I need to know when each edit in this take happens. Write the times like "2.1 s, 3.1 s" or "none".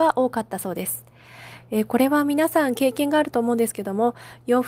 none